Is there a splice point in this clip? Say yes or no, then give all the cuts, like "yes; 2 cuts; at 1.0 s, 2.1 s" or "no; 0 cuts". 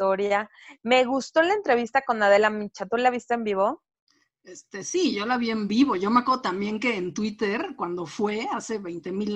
no; 0 cuts